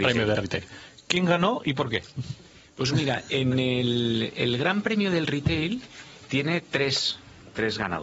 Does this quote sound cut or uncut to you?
uncut